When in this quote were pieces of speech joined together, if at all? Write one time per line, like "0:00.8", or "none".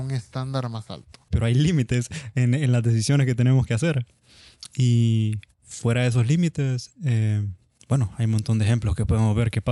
0:01.3